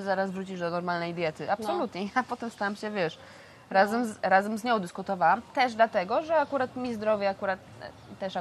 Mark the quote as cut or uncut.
uncut